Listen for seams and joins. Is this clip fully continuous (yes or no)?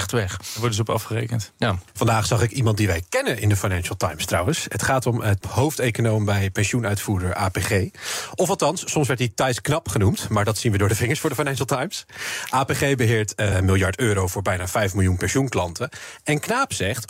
no